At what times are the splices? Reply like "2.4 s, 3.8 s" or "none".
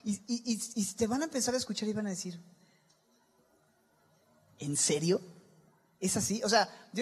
none

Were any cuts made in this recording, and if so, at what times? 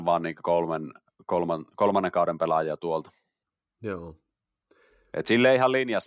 none

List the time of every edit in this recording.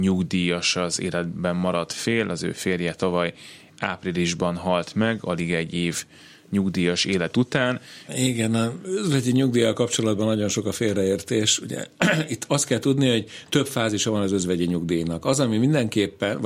8.1 s

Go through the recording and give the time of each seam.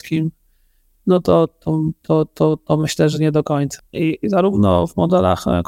3.8 s

